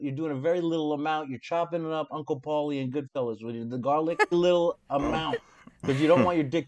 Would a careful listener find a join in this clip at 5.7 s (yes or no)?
no